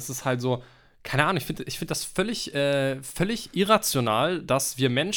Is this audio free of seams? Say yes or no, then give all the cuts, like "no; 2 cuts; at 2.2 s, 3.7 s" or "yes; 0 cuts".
yes; 0 cuts